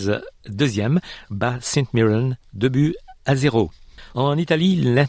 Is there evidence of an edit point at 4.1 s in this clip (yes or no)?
yes